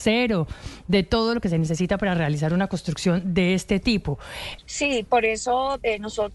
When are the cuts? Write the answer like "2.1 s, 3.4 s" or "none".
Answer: 4.6 s